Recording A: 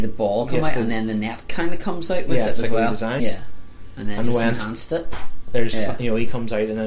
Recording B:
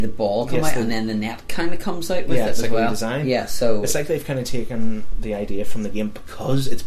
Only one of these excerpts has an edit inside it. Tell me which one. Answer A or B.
A